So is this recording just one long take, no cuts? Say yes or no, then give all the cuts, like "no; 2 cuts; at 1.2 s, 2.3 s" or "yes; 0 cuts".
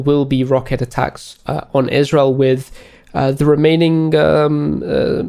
yes; 0 cuts